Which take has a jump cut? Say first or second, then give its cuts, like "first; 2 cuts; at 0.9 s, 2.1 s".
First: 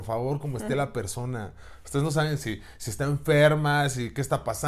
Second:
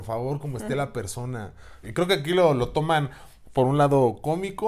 second; 1 cut; at 1.8 s